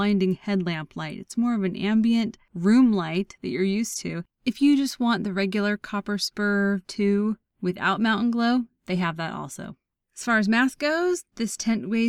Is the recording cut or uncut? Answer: cut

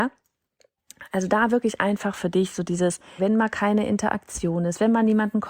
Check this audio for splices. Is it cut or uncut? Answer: cut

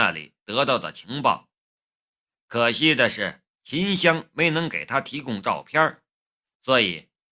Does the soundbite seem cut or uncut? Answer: uncut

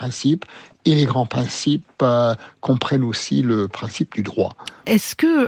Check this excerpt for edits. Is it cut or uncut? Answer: uncut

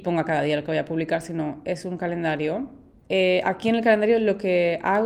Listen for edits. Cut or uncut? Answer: cut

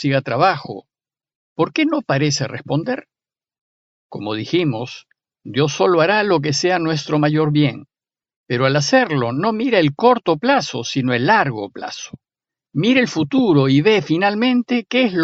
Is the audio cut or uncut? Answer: uncut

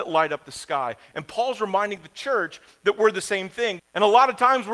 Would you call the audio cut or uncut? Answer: cut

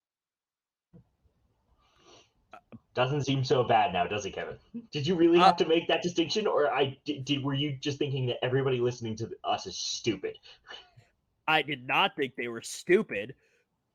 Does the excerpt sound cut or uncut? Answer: cut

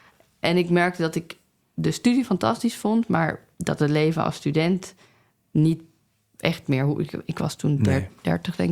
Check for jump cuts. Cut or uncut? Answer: uncut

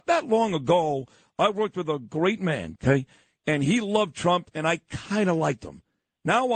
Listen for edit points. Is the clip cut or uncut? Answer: cut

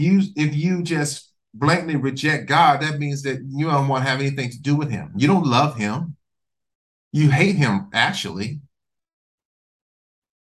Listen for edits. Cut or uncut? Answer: uncut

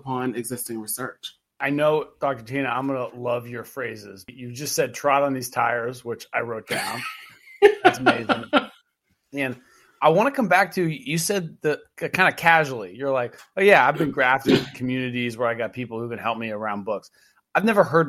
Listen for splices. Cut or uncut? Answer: uncut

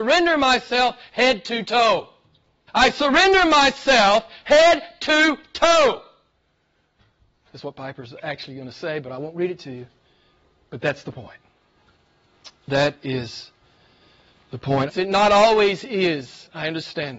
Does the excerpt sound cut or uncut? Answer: cut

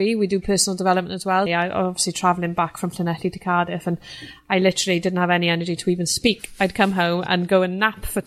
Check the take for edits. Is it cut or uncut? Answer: cut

